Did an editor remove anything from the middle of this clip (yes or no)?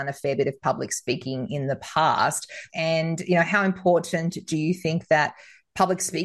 yes